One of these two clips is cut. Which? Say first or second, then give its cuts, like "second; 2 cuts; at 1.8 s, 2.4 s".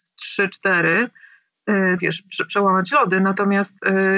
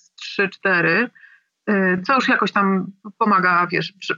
first; 1 cut; at 2.0 s